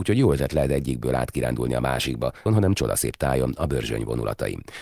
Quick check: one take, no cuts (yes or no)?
no